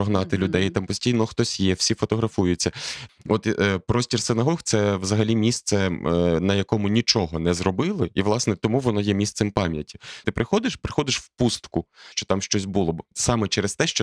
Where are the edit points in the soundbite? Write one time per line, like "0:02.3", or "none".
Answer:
0:03.1
0:10.2
0:12.1